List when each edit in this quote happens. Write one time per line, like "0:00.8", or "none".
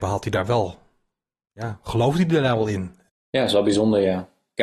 0:03.1